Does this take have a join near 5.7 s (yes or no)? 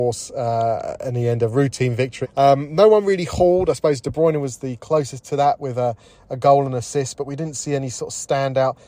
no